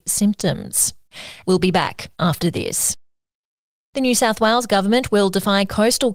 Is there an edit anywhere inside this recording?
yes; 1 cut; at 1.4 s

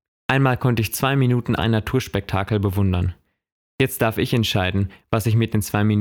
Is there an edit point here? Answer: yes; 2 cuts; at 1.6 s, 3.6 s

